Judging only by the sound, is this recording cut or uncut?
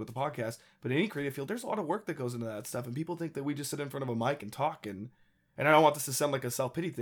uncut